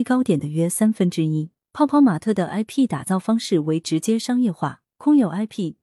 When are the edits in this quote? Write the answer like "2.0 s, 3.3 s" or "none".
1.7 s